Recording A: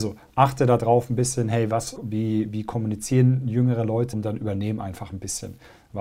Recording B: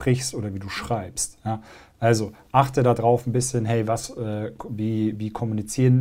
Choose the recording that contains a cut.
A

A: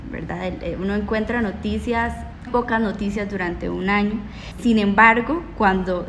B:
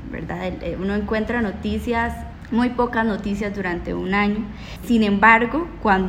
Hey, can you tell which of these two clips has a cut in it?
A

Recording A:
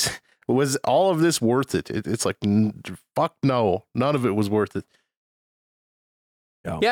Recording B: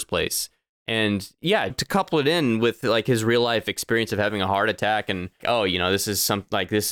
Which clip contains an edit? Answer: B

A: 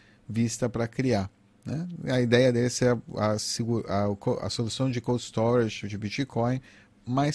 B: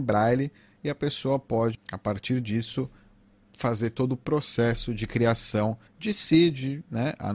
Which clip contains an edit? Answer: B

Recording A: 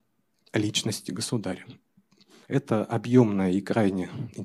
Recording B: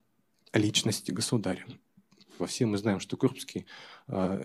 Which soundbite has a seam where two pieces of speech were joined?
B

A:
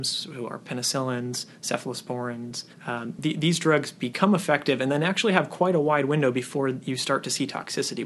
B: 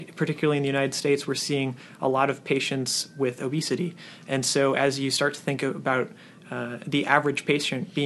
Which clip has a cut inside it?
A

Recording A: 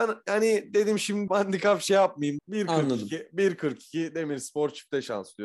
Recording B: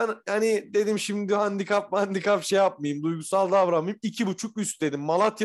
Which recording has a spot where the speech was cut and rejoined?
A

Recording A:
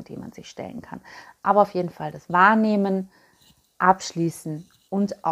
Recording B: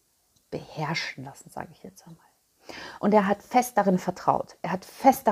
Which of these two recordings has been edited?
B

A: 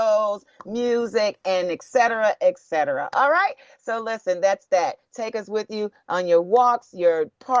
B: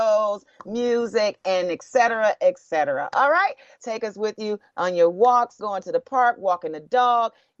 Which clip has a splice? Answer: B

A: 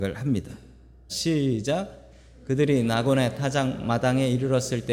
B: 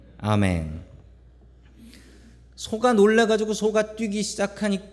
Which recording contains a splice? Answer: A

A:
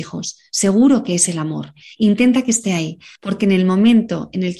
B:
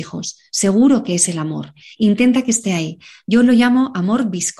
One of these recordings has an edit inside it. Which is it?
A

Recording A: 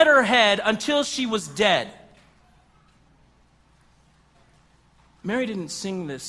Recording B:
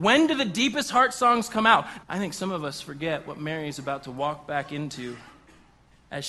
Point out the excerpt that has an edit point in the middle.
B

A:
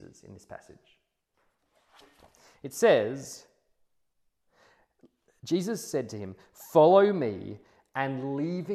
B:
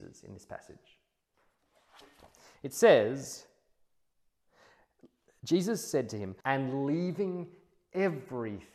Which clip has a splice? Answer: B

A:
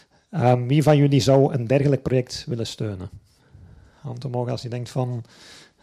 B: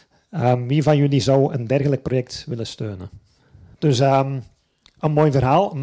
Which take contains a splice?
B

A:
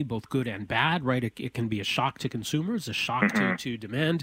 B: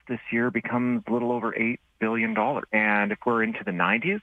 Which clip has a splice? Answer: B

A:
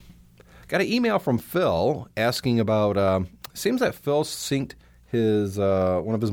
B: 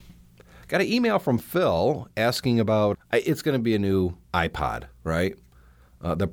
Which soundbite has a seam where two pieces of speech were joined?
B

